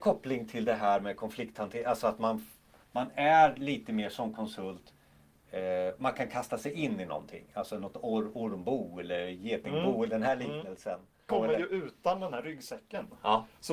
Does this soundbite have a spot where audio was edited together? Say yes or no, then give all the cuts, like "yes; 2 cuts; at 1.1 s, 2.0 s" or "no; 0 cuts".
yes; 1 cut; at 11.3 s